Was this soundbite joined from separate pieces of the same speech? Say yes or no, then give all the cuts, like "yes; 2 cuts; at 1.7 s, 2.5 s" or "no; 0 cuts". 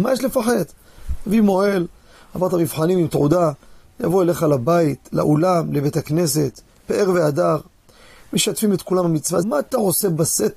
yes; 1 cut; at 9.4 s